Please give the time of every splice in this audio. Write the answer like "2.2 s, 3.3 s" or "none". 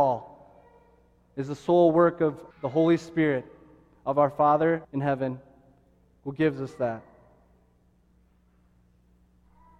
2.5 s, 4.8 s